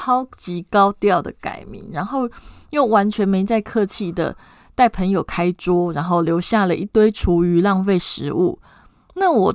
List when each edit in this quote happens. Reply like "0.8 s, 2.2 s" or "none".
none